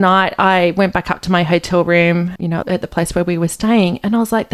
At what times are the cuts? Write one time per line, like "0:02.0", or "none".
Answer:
0:02.6